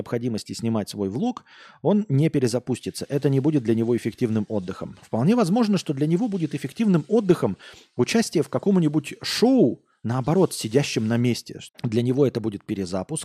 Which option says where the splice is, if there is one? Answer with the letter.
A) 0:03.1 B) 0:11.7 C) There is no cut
B